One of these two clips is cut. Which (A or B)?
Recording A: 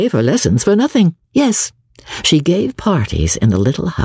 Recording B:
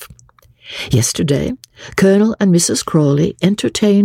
A